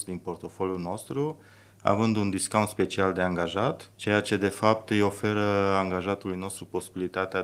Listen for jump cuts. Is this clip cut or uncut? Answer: cut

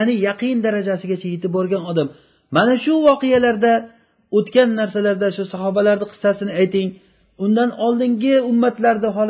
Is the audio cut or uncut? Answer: uncut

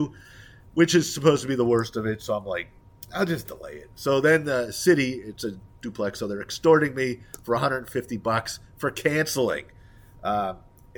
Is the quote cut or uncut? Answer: uncut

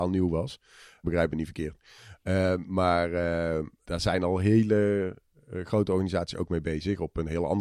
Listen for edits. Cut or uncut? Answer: cut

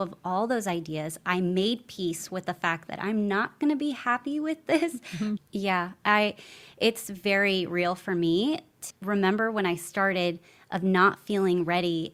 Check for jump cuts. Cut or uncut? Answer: cut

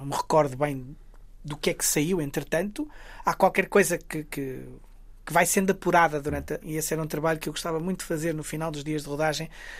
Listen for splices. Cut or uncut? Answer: cut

